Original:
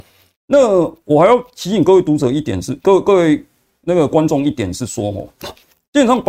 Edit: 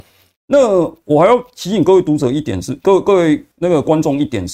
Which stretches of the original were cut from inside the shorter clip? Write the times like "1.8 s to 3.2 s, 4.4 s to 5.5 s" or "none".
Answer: 3.5 s to 3.8 s